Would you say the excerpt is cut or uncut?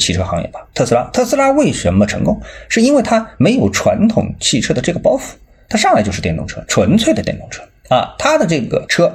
uncut